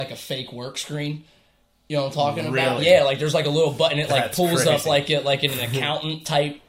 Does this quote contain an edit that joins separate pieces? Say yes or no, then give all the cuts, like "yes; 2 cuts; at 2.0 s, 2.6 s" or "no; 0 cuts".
no; 0 cuts